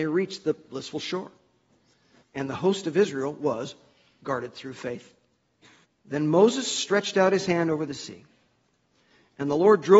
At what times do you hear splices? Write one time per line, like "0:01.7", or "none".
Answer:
0:02.2
0:05.8